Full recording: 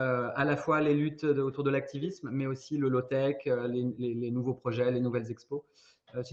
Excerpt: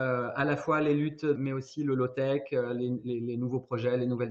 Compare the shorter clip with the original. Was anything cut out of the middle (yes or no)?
yes